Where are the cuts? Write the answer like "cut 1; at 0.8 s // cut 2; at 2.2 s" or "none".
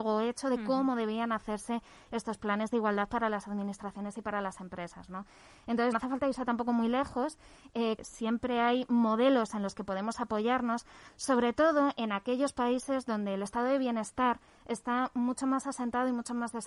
cut 1; at 5.9 s // cut 2; at 8.0 s